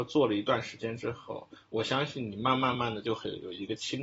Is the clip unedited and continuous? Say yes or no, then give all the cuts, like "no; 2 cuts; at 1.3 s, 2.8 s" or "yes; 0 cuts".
no; 1 cut; at 2.7 s